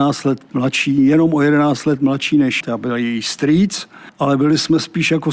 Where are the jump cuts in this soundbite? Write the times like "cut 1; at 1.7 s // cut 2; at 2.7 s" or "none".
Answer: cut 1; at 2.6 s